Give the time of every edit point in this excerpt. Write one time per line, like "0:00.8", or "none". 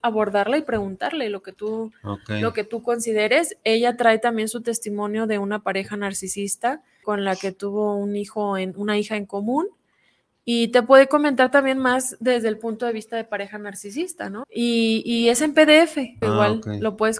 0:07.0
0:14.4
0:16.2